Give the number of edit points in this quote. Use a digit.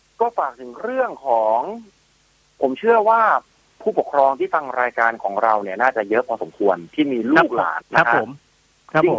1